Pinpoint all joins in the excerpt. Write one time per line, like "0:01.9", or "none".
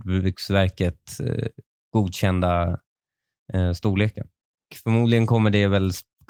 none